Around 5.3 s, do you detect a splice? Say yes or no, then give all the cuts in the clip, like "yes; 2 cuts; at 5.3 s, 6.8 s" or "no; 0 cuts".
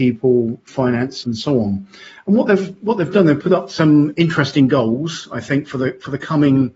no; 1 cut; at 1.2 s